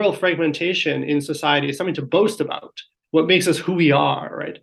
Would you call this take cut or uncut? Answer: cut